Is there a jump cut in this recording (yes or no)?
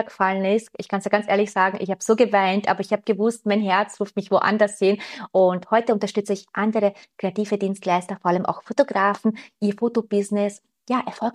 no